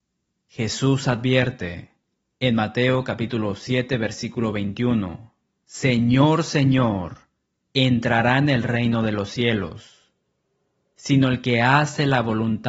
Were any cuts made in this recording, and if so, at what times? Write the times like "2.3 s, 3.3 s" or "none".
5.6 s